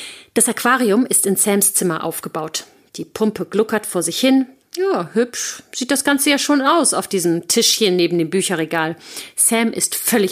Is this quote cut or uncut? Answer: uncut